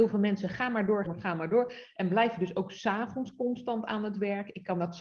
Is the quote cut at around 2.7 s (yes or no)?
no